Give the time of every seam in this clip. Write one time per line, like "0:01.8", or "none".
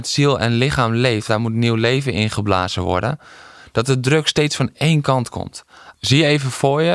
0:01.3
0:05.9